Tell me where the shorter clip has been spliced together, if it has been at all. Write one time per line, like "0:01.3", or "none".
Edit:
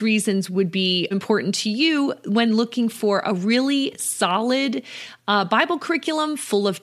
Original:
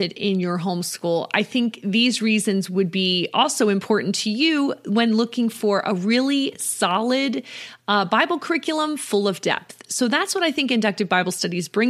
0:01.1